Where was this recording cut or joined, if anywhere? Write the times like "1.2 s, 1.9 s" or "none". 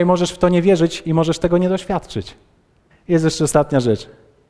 2.9 s